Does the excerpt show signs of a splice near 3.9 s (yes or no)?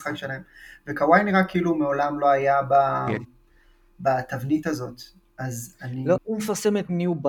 no